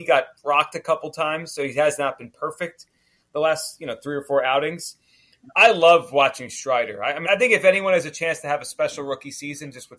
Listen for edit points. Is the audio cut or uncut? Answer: cut